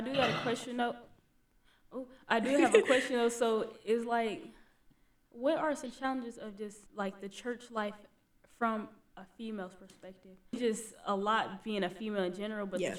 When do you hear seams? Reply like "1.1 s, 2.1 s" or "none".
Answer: 6.9 s, 10.5 s